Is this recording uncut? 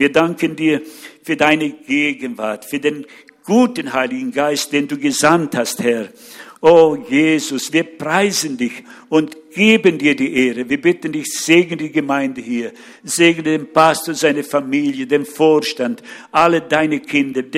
no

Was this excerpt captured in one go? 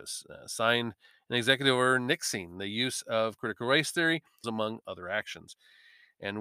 no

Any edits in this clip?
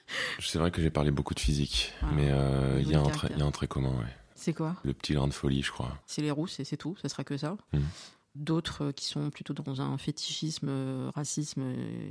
yes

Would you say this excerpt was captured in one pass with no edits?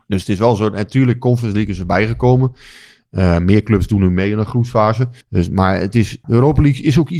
no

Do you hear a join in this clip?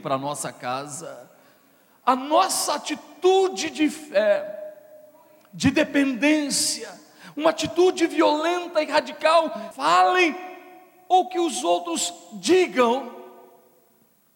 yes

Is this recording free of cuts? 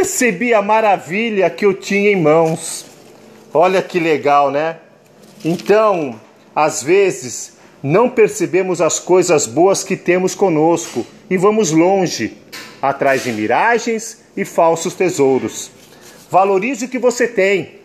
yes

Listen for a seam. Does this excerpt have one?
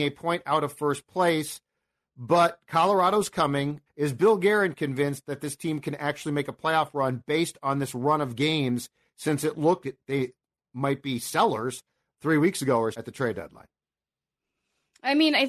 yes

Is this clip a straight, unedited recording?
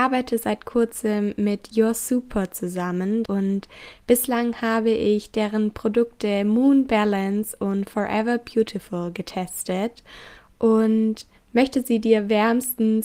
no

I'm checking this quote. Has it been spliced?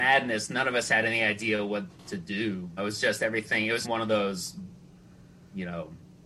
yes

